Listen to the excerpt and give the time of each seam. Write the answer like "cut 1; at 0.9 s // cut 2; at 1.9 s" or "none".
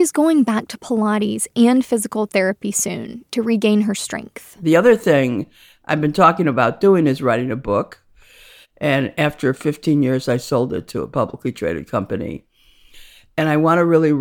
cut 1; at 8.6 s